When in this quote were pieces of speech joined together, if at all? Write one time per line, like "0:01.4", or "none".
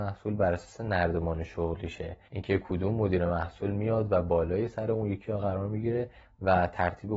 0:02.3